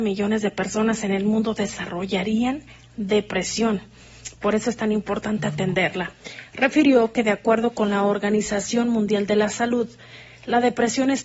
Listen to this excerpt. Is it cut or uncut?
uncut